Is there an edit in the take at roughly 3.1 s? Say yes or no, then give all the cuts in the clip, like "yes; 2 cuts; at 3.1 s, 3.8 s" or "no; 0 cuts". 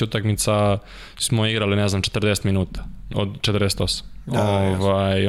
yes; 1 cut; at 3.1 s